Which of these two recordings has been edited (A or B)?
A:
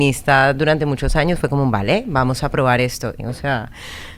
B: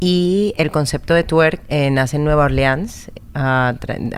A